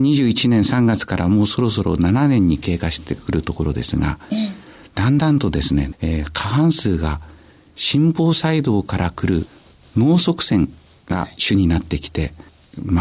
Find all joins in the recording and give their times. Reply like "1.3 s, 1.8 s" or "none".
5.9 s